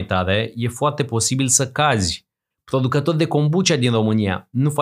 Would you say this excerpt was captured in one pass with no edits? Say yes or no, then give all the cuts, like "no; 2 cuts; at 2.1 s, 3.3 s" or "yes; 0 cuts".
no; 1 cut; at 2.5 s